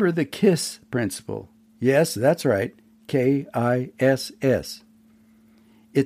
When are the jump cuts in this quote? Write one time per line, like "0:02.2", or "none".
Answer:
none